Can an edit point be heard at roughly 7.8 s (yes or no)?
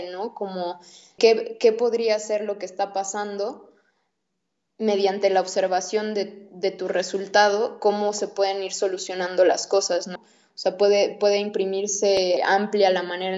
no